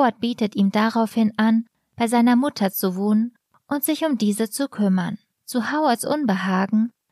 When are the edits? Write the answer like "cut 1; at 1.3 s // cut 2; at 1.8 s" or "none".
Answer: cut 1; at 5.3 s